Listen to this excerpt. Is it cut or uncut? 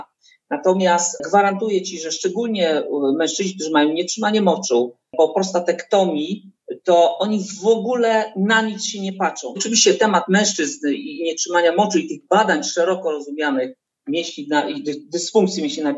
cut